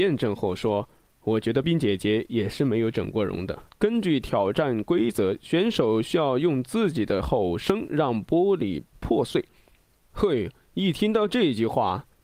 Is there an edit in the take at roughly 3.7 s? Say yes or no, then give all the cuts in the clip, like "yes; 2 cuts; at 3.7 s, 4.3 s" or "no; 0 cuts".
yes; 3 cuts; at 1.6 s, 3.7 s, 10.0 s